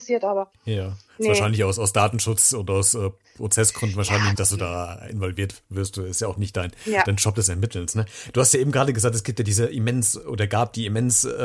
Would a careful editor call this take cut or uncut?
cut